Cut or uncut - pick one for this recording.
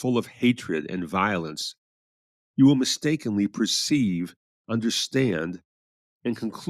uncut